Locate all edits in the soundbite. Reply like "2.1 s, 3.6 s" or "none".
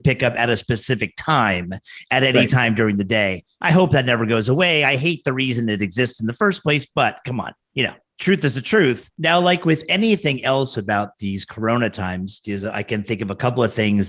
9.2 s